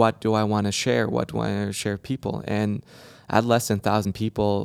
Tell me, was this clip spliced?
no; 0 cuts

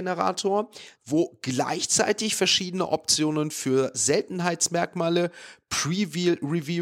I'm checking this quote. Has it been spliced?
yes; 1 cut; at 0.9 s

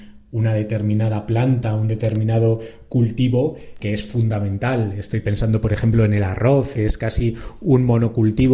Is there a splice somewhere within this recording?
yes; 2 cuts; at 3.8 s, 6.7 s

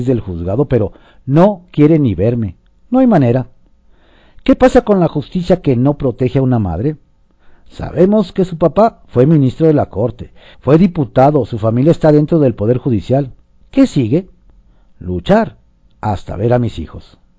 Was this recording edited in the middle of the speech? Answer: yes; 2 cuts; at 10.5 s, 13.6 s

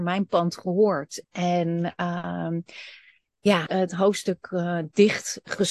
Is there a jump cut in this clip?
yes; 2 cuts; at 1.2 s, 3.7 s

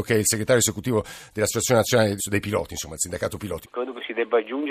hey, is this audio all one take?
no; 2 cuts; at 2.2 s, 3.6 s

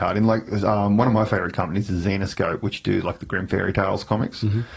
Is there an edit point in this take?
no; 0 cuts

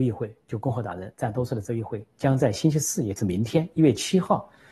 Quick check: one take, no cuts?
yes; 0 cuts

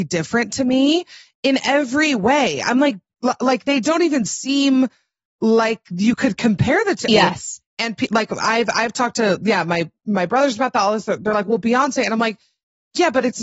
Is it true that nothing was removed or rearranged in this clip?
no; 1 cut; at 7.1 s

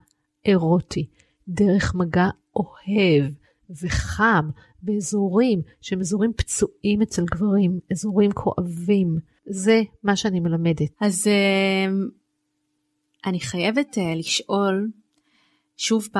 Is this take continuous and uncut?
no; 2 cuts; at 9.4 s, 10.9 s

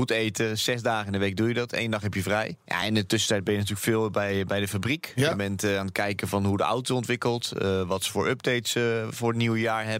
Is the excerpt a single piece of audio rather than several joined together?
yes; 0 cuts

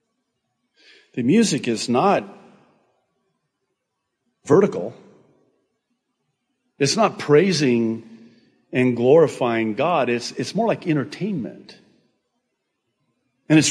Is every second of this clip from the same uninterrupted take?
yes; 0 cuts

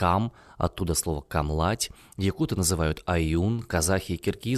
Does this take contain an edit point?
no; 0 cuts

